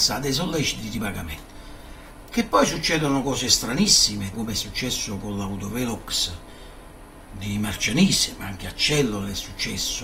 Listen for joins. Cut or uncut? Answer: cut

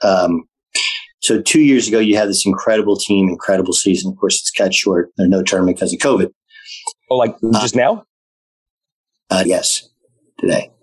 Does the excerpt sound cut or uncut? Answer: cut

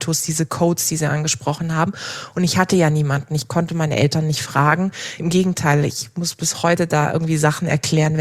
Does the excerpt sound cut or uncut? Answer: uncut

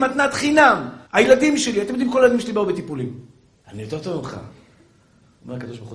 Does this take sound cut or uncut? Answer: cut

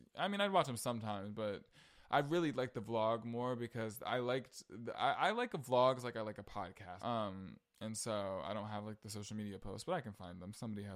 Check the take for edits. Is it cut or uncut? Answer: cut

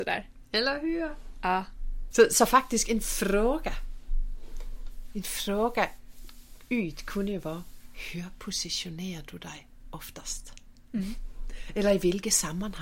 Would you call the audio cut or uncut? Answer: cut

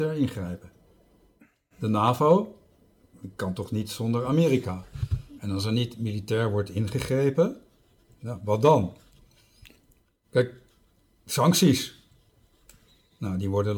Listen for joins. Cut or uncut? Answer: uncut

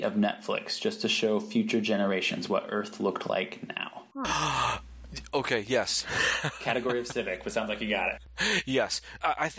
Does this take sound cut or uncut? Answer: uncut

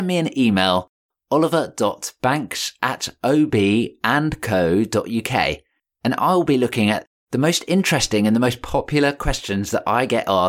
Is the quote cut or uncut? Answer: uncut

